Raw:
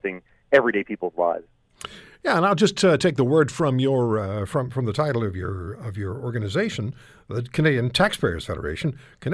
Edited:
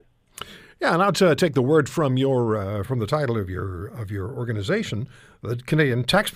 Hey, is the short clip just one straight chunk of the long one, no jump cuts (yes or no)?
no